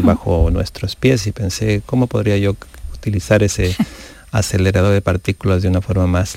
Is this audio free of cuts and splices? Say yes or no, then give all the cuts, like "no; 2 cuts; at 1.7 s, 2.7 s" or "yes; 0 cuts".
yes; 0 cuts